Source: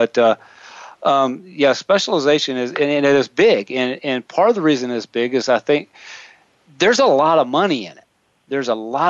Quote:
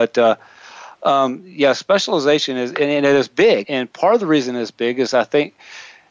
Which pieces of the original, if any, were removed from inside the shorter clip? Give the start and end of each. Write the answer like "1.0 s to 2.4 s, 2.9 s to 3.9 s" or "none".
3.6 s to 4.0 s